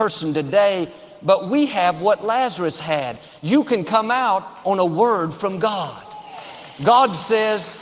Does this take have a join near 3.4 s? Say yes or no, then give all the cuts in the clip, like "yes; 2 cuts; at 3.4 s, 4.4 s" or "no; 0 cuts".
no; 0 cuts